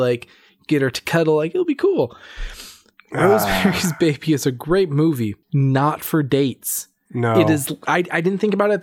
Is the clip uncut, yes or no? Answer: no